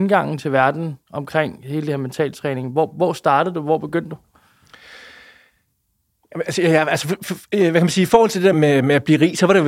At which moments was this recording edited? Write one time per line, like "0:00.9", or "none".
0:08.5